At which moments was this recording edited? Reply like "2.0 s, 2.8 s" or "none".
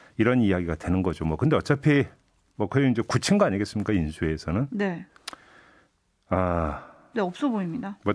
7.1 s